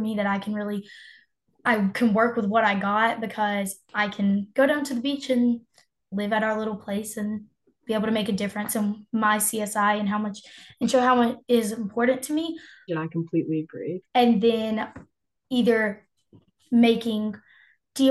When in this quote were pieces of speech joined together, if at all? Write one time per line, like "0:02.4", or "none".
0:12.9
0:14.0